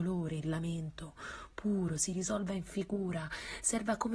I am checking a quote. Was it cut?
no; 0 cuts

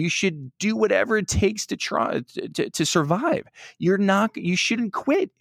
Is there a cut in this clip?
no; 0 cuts

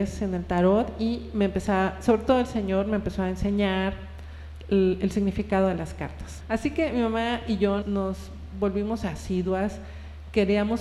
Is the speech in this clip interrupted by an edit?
yes; 2 cuts; at 6.4 s, 7.8 s

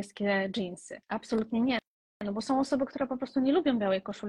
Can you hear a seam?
yes; 1 cut; at 1.0 s

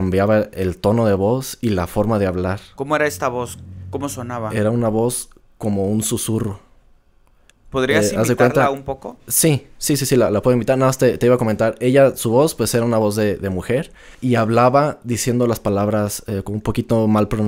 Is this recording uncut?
yes; 0 cuts

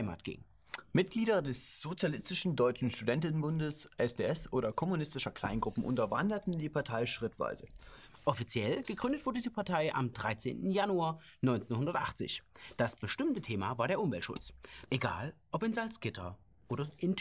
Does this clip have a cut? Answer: yes; 2 cuts; at 8.1 s, 14.8 s

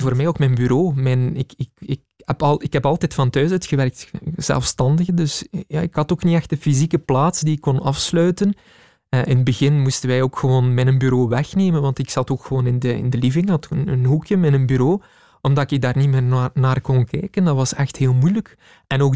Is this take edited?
no; 0 cuts

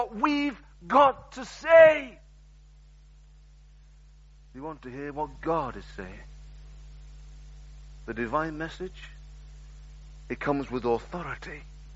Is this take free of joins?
yes; 0 cuts

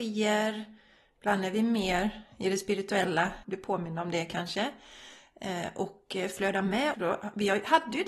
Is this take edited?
yes; 2 cuts; at 3.4 s, 6.9 s

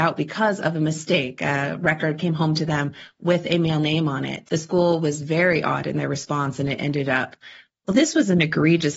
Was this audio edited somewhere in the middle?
yes; 2 cuts; at 4.5 s, 7.7 s

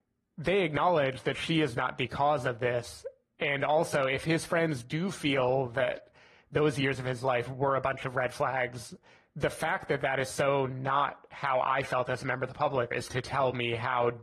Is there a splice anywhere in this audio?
yes; 1 cut; at 12.9 s

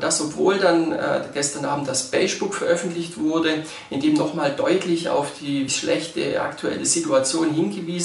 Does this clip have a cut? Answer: yes; 1 cut; at 5.7 s

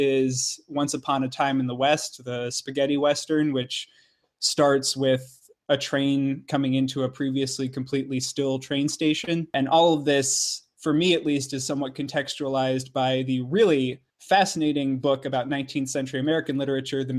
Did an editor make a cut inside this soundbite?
no; 0 cuts

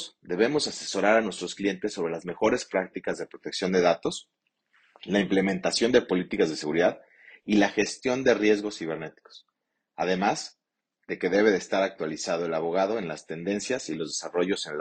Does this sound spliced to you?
no; 0 cuts

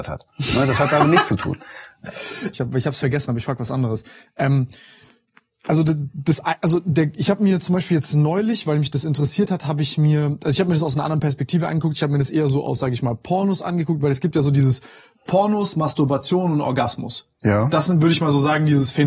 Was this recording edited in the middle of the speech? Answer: yes; 1 cut; at 2.5 s

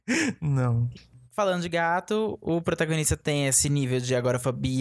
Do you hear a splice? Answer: no; 0 cuts

